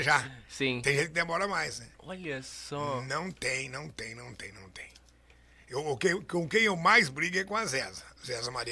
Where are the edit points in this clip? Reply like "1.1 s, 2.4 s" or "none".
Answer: 1.9 s